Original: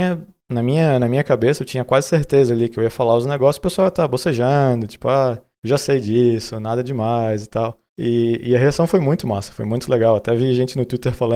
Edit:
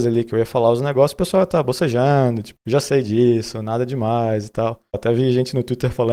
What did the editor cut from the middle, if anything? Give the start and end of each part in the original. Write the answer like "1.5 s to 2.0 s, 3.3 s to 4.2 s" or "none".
5.0 s to 5.5 s, 7.9 s to 10.2 s